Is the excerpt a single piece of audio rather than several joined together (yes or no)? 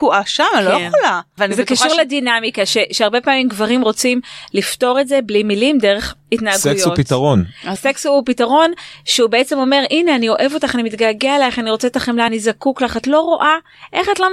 no